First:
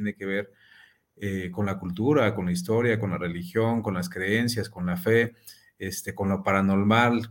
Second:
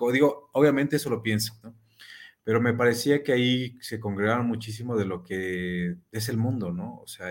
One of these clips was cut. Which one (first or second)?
second